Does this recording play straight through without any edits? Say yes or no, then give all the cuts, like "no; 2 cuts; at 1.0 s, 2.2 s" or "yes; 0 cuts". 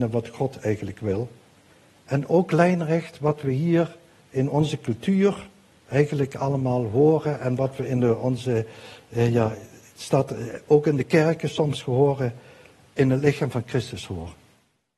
yes; 0 cuts